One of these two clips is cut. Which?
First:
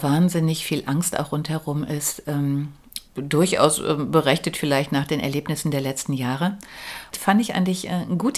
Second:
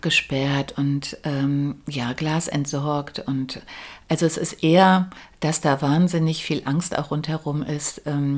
first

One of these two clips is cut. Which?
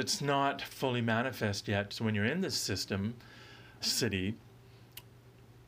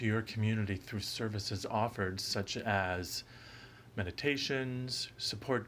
first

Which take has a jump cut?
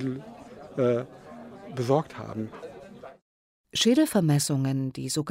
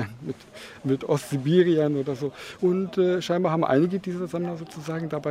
second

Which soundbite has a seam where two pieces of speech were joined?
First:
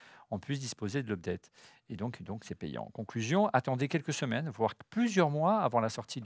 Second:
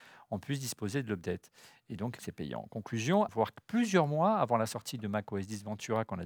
second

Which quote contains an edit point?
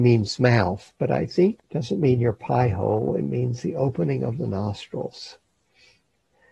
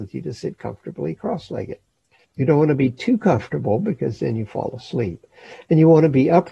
second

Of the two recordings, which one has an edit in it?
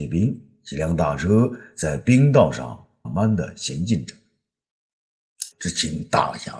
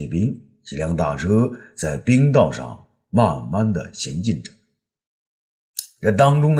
first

